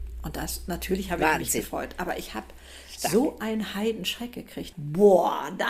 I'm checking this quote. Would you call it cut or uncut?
cut